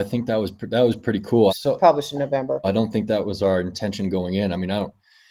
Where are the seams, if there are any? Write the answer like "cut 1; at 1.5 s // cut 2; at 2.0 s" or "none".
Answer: cut 1; at 1.5 s // cut 2; at 2.6 s